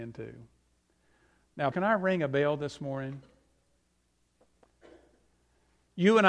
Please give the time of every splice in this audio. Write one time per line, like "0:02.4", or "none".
0:01.7